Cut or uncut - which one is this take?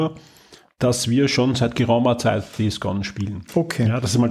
uncut